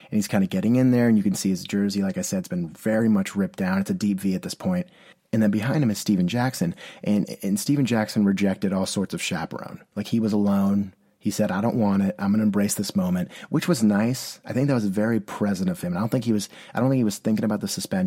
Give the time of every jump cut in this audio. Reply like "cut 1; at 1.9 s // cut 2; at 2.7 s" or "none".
none